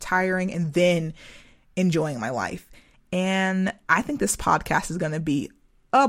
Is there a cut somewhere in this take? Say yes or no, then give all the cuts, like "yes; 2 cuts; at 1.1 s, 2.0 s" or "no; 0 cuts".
yes; 1 cut; at 2.9 s